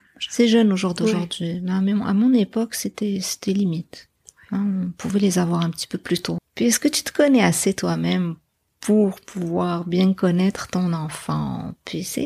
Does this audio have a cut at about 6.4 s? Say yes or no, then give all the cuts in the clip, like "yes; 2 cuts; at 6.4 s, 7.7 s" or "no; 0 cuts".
yes; 1 cut; at 6.4 s